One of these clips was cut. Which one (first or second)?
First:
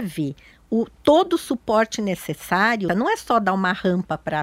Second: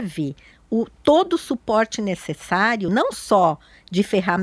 first